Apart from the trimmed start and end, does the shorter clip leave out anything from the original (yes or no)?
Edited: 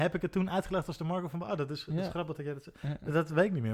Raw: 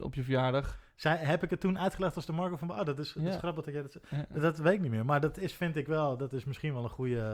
no